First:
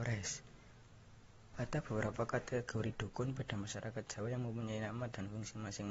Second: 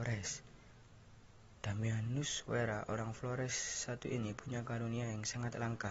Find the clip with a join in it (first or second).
first